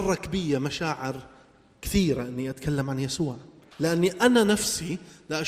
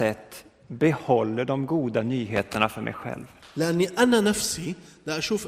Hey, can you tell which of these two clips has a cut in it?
first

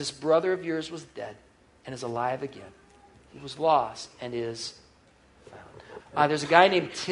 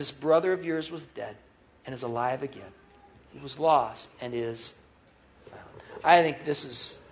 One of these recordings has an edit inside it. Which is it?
first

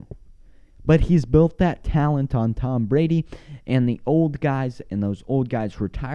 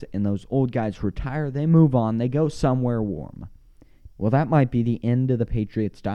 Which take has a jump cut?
second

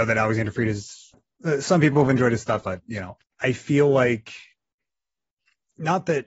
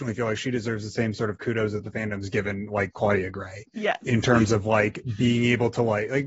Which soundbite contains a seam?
first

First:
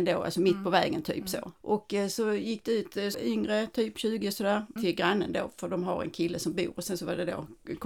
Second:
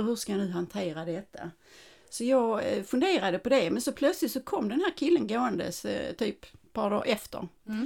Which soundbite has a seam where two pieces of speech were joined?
first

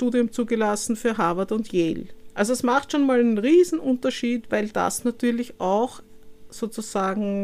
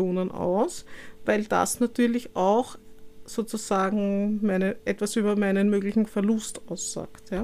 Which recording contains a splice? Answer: first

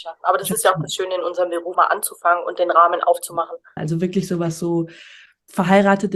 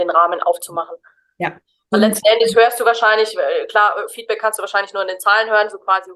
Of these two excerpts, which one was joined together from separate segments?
first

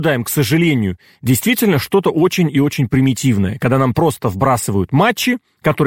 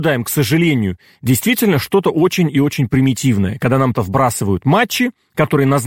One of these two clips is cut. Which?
second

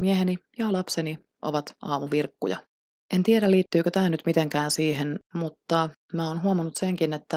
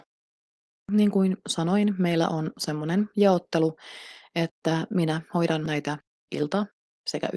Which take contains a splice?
first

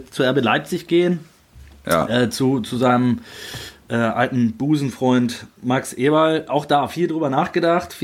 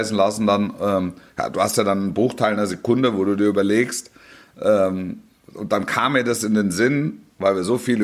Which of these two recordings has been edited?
first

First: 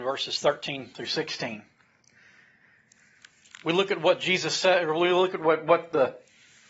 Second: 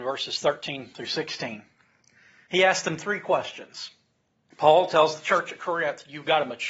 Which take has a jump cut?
second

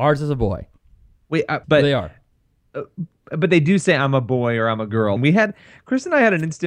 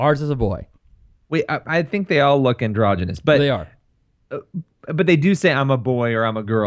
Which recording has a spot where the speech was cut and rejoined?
first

